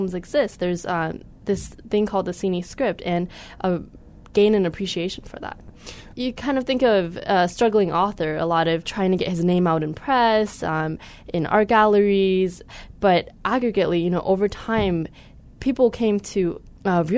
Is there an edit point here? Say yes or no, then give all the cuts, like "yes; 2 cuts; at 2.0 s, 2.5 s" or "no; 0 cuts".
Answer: yes; 1 cut; at 6.1 s